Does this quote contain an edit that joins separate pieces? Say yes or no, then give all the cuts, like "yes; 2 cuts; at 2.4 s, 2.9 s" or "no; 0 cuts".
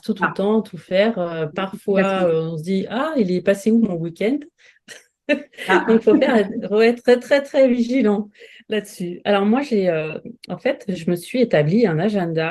no; 0 cuts